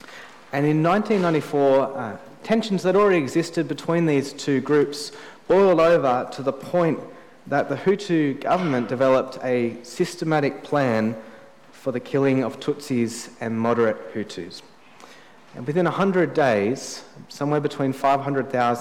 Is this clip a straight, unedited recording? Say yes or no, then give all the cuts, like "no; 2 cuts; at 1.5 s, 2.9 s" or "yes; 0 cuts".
yes; 0 cuts